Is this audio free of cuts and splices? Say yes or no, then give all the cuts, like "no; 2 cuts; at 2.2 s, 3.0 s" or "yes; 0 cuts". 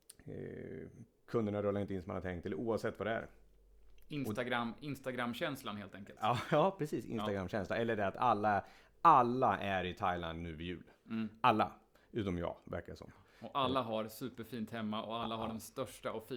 yes; 0 cuts